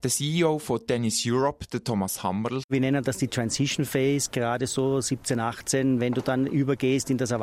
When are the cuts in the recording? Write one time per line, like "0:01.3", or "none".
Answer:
0:02.6

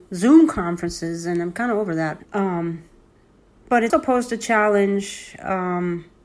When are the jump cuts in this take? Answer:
0:02.2
0:03.9

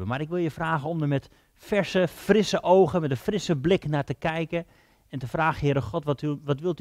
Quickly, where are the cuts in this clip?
none

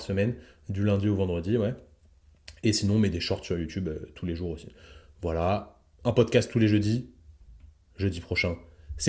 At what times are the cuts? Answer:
0:07.9

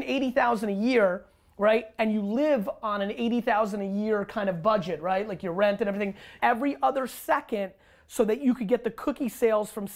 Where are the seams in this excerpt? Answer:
0:06.4

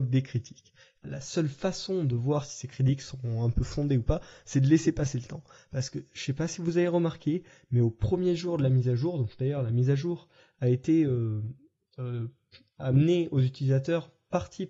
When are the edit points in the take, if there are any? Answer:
0:01.0

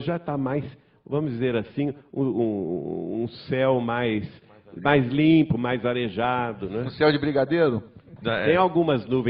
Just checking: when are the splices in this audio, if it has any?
0:08.2

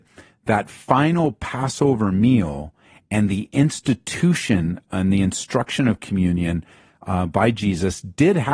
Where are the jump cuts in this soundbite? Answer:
none

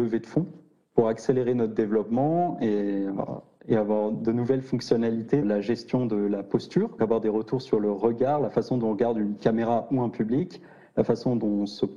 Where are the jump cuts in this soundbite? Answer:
0:05.4
0:07.0

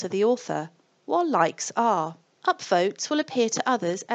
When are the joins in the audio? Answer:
0:02.4

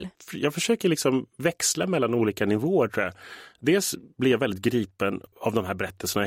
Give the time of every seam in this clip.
none

